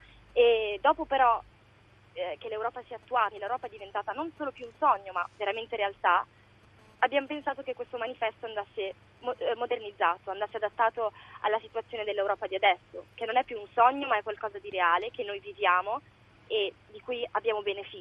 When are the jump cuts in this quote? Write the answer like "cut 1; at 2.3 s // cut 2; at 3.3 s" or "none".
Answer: cut 1; at 3.3 s